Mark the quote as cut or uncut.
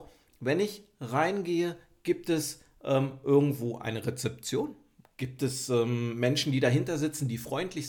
uncut